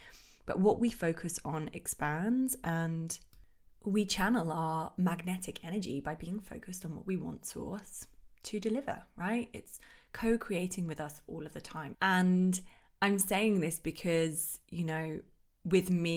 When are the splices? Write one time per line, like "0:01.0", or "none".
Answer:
0:11.9